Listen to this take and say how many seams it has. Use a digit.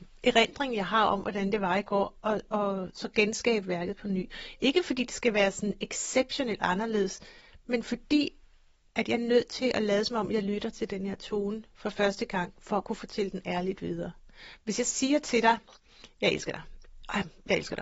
0